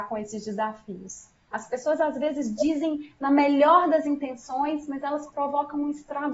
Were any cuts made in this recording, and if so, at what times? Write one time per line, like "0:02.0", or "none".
0:01.5